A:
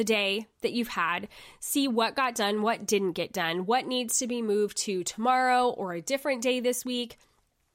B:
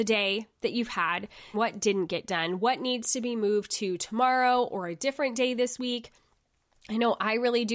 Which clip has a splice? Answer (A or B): B